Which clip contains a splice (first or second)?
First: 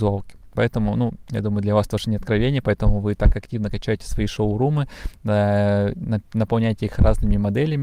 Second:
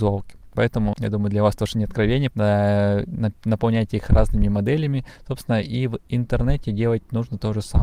second